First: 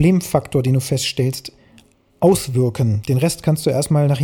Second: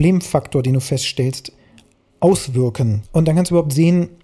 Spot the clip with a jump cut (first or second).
second